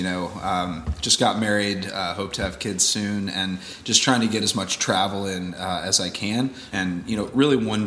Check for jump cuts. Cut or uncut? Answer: cut